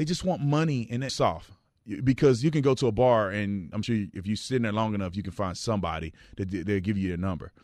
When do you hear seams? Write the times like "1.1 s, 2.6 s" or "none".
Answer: 1.1 s, 3.8 s